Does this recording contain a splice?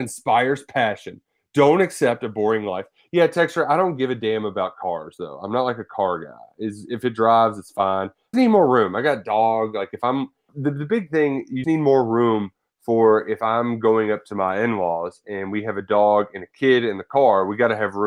yes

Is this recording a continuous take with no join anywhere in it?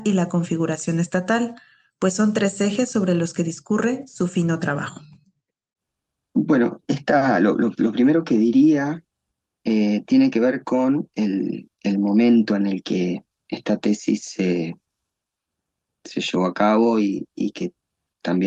no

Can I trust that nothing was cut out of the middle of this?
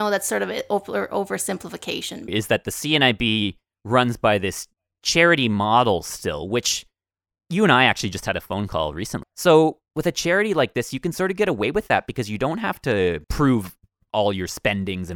no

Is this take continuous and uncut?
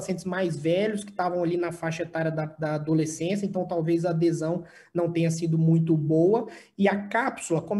yes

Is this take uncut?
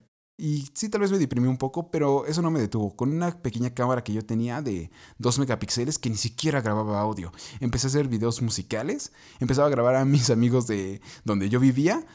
yes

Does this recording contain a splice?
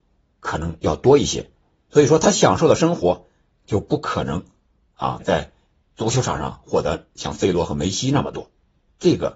yes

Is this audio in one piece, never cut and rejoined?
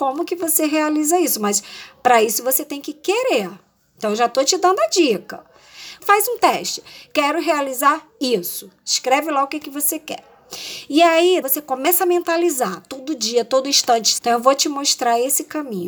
no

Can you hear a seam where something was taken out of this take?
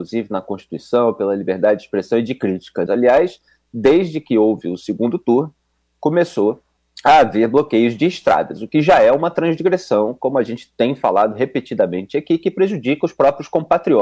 yes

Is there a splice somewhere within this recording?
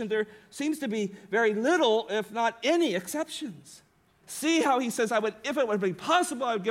yes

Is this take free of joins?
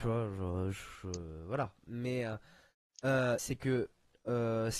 no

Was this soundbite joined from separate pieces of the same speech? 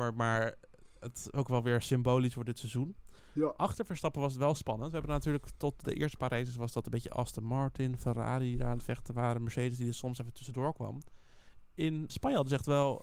yes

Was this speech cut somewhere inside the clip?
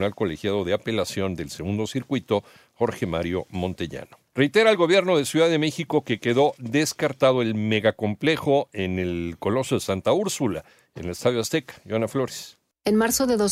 yes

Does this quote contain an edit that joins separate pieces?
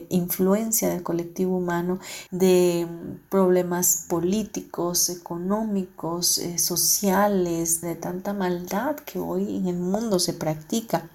yes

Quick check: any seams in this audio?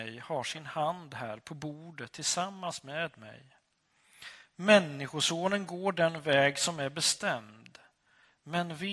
no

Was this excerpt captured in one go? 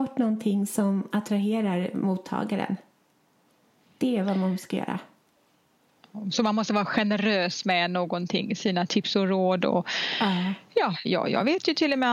no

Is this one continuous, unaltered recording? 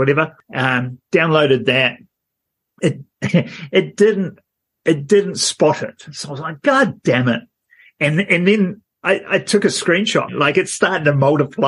no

